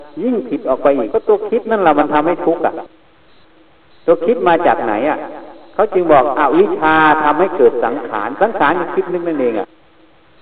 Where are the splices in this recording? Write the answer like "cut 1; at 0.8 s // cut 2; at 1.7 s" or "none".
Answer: cut 1; at 1.1 s